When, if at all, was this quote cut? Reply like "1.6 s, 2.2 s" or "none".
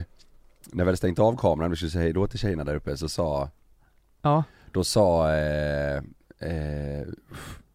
none